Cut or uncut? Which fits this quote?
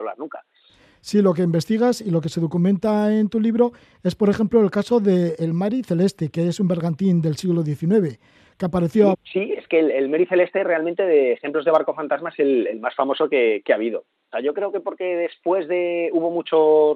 cut